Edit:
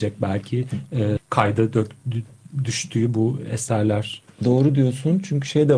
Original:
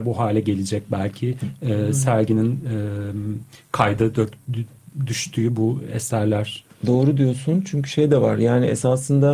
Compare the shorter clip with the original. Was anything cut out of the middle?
yes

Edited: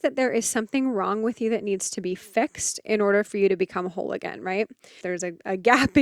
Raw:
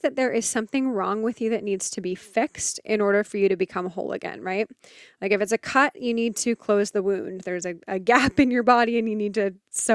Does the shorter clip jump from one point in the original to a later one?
yes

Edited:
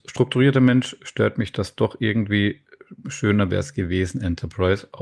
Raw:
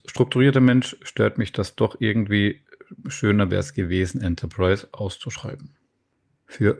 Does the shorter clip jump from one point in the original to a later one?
no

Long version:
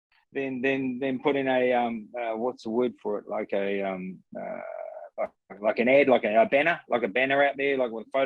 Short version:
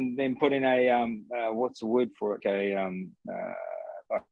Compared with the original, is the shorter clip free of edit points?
no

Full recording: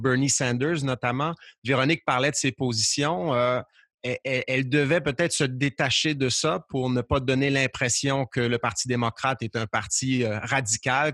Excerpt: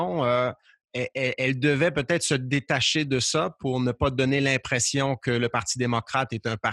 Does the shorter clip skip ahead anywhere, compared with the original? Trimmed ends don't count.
no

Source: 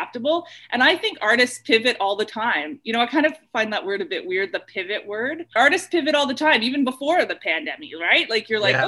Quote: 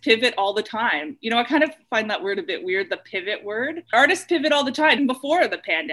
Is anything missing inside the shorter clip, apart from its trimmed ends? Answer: yes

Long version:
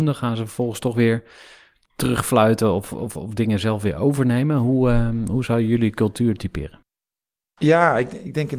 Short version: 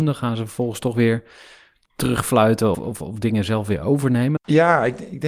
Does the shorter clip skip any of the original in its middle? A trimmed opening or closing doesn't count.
yes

